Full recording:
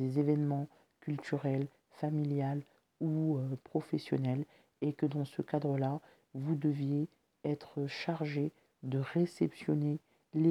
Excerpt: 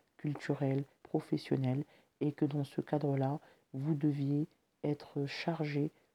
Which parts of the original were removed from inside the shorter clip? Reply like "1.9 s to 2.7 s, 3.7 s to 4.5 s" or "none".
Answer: 1.8 s to 3.6 s